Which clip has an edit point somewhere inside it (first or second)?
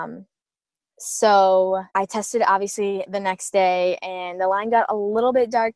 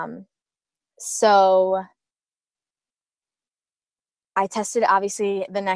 first